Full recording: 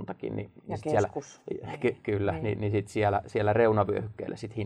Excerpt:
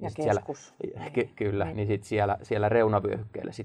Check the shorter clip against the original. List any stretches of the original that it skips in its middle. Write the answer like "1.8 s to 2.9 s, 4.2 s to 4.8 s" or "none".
2.4 s to 2.6 s